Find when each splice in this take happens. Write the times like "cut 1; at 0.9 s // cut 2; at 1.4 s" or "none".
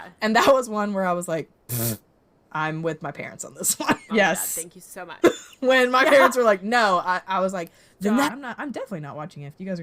cut 1; at 4.1 s // cut 2; at 5.2 s // cut 3; at 8.3 s